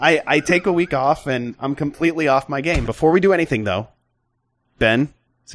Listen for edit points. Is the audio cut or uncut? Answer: cut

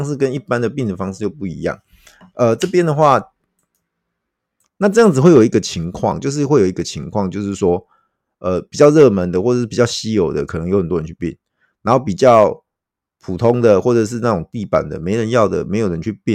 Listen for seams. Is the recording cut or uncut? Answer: cut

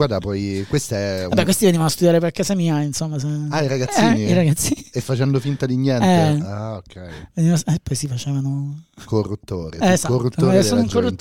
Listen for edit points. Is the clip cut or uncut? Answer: uncut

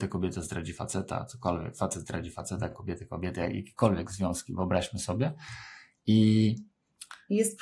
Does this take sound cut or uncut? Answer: uncut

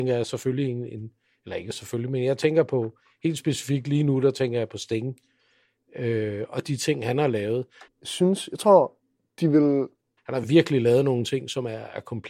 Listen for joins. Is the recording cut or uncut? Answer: cut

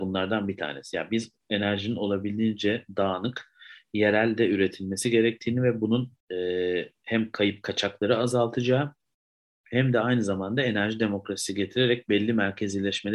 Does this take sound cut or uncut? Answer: cut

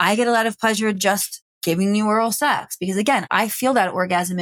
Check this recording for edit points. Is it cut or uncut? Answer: uncut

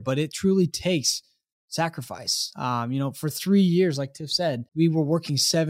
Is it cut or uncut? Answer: cut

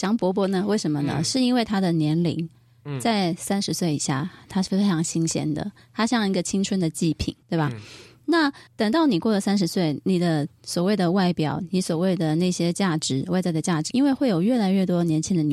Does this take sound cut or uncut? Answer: cut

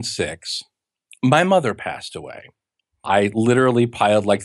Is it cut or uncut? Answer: cut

